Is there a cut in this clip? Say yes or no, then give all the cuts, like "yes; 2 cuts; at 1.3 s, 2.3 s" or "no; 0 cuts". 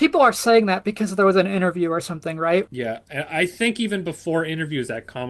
yes; 1 cut; at 2.7 s